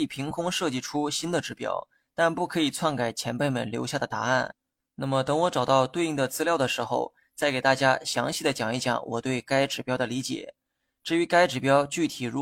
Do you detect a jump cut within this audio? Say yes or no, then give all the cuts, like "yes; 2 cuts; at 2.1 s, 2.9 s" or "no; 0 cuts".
no; 0 cuts